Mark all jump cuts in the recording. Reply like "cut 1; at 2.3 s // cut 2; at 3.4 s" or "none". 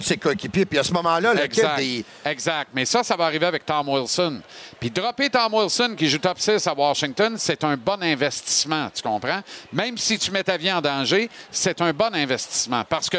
none